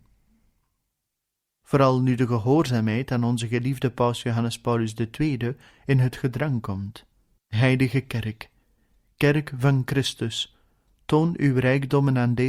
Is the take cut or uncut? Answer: cut